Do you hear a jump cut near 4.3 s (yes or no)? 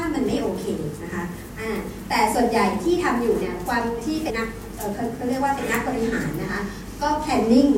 yes